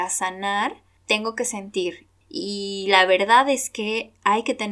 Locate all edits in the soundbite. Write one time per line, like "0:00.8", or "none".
0:01.0
0:02.2